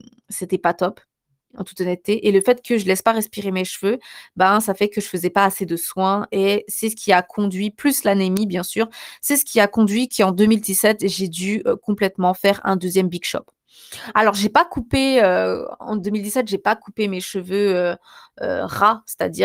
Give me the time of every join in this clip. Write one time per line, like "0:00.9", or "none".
none